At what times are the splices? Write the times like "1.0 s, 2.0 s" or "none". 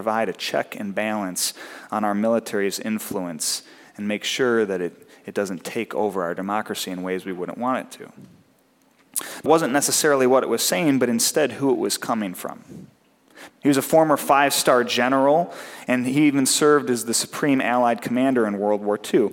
9.5 s, 13.5 s

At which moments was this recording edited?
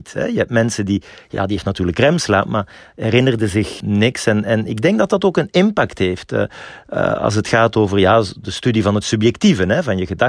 none

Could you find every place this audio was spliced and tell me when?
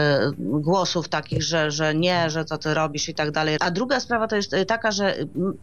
3.6 s

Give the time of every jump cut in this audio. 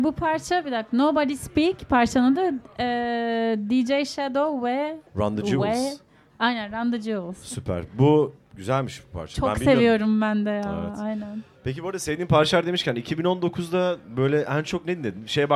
5.1 s

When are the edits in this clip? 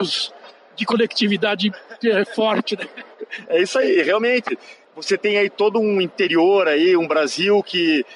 none

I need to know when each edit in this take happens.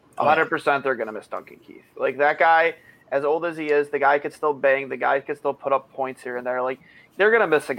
none

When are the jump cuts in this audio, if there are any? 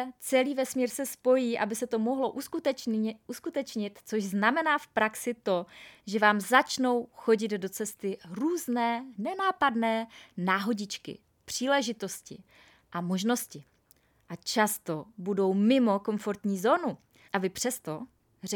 17.3 s

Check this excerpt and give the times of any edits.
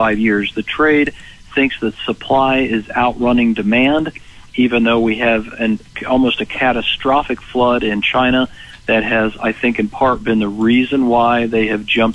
none

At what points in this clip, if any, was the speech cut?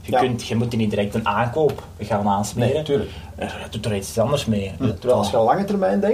2.0 s, 4.9 s

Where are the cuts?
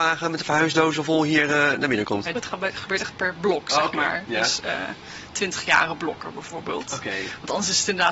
2.3 s

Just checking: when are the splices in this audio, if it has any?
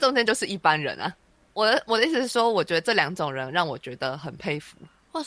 none

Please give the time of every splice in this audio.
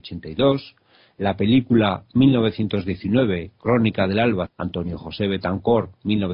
4.5 s

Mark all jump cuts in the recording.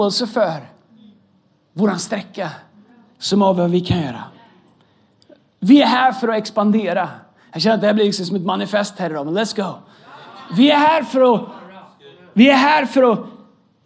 none

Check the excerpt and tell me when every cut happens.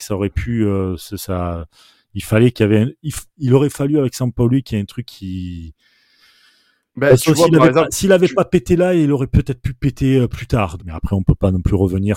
10.8 s

